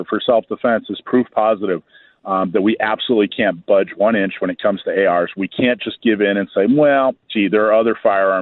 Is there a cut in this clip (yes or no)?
no